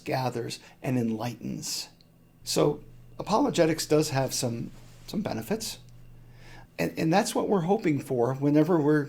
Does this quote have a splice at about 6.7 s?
yes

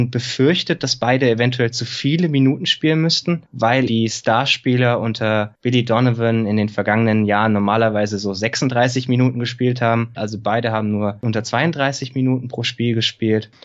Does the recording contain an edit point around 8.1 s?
no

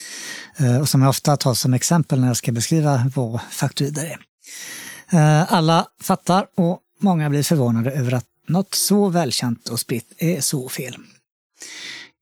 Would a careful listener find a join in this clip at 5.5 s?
no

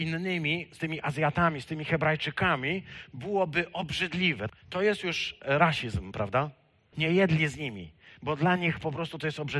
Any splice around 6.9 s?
yes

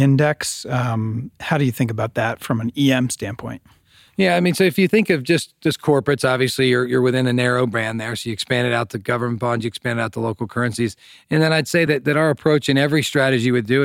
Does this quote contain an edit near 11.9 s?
no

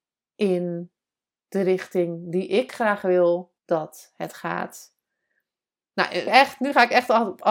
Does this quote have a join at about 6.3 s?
yes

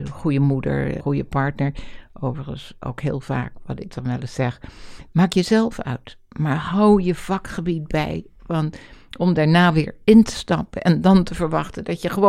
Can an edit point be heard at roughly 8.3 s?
no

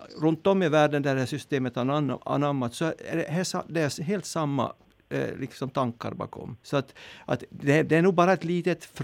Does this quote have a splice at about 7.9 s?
no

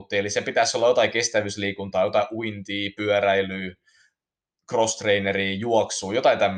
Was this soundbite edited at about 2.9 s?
no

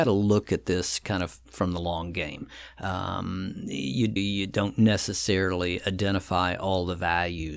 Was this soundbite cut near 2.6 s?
no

